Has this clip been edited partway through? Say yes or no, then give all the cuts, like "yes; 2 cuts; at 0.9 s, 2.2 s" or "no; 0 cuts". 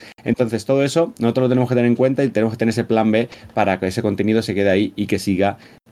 no; 0 cuts